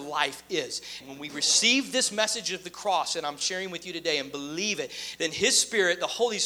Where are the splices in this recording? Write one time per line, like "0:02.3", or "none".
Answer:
0:01.0
0:05.2